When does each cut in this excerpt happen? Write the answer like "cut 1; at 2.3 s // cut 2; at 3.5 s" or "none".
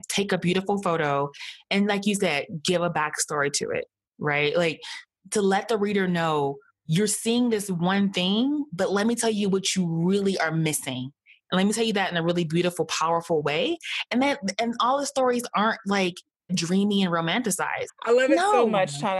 cut 1; at 16.5 s // cut 2; at 17.9 s